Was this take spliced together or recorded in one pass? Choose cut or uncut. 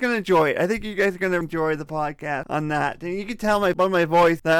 cut